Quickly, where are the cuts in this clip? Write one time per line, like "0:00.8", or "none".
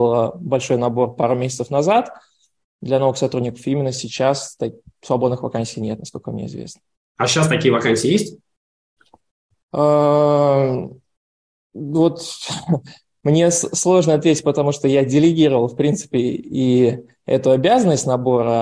0:07.0